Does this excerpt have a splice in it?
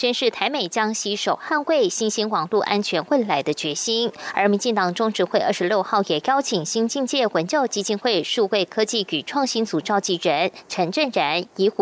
no; 0 cuts

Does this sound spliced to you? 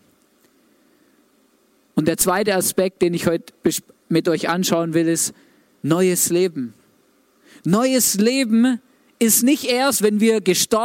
no; 0 cuts

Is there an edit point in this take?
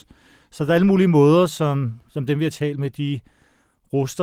no; 0 cuts

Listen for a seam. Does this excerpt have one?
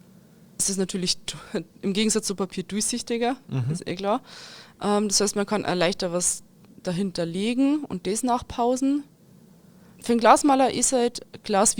no; 0 cuts

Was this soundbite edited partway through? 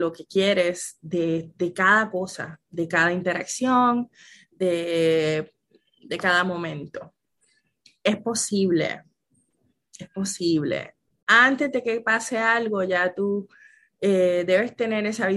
yes; 1 cut; at 11.2 s

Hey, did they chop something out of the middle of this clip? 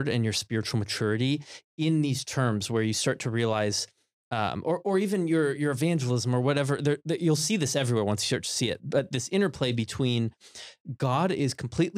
no; 0 cuts

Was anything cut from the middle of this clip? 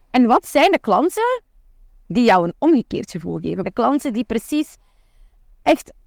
yes; 1 cut; at 3.6 s

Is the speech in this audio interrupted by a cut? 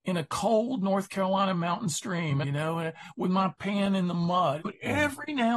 yes; 2 cuts; at 2.4 s, 4.6 s

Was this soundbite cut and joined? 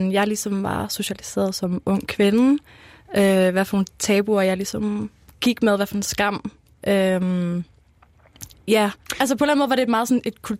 no; 0 cuts

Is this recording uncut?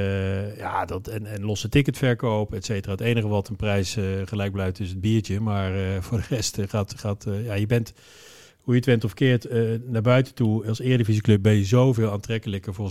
yes; 0 cuts

